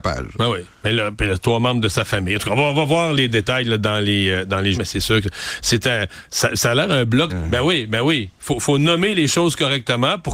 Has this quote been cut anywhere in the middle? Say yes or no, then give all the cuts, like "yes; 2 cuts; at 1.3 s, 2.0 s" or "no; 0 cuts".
yes; 2 cuts; at 4.7 s, 7.3 s